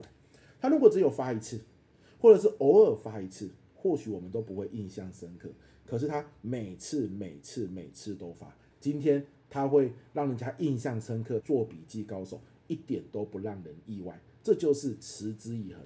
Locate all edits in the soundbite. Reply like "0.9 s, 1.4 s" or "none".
8.7 s, 11.4 s